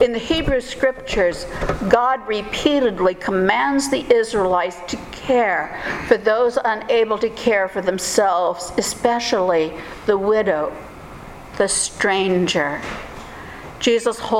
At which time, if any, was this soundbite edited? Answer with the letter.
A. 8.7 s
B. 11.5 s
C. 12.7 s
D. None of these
B